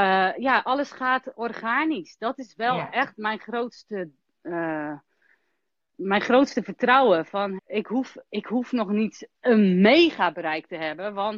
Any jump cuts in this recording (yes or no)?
yes